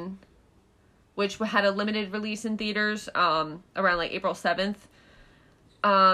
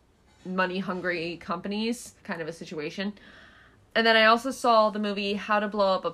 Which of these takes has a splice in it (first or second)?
second